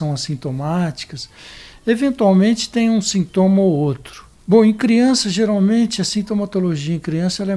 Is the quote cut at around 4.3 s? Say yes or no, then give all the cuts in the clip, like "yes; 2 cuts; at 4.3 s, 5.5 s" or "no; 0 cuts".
yes; 1 cut; at 4.3 s